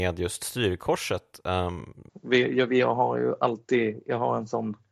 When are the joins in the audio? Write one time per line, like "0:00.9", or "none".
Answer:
0:02.1